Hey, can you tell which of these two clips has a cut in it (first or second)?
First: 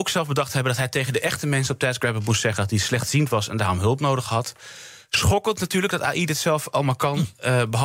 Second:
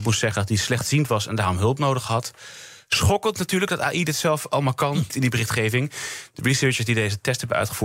second